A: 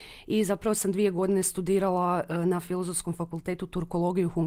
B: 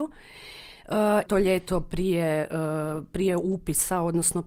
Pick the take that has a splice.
B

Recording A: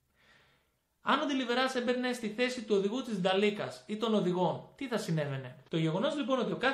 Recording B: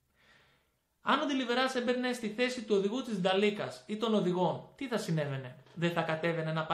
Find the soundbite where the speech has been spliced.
A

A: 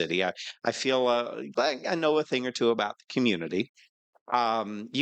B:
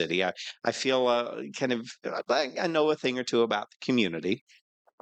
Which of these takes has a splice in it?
A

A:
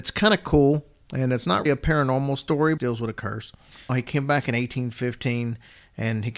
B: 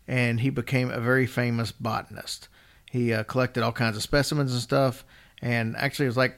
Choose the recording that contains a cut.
A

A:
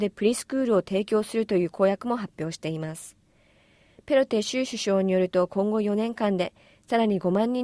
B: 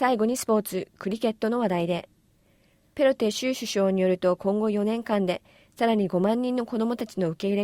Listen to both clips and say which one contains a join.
B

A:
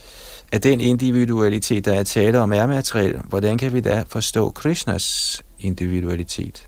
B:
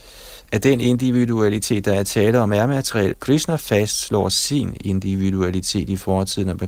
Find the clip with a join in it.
B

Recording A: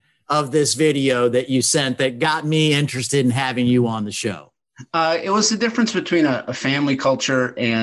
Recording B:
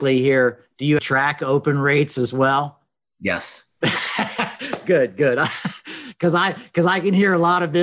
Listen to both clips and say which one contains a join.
B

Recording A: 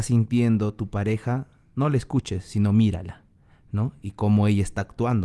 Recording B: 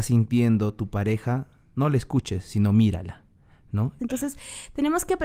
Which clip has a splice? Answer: B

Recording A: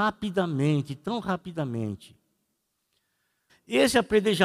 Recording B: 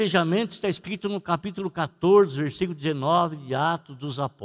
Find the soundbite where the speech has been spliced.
A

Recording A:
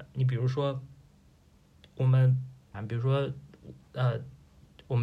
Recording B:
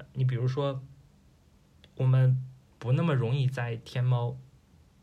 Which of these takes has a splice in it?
A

